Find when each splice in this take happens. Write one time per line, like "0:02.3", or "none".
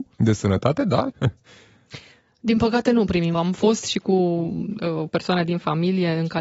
0:01.1
0:03.3